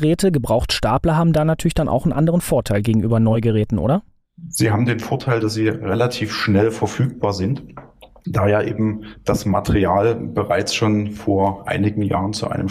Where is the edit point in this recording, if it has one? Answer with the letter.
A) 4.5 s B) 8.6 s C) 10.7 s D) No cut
D